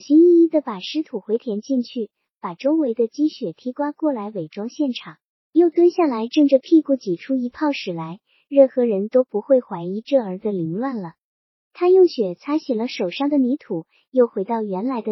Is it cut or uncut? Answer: uncut